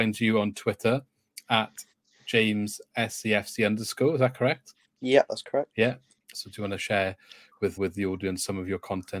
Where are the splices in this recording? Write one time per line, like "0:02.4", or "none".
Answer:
0:06.3
0:07.8